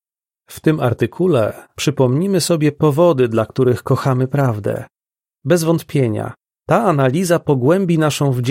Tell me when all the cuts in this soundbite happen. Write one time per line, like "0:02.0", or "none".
0:05.3